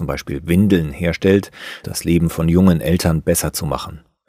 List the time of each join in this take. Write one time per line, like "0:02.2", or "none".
0:01.8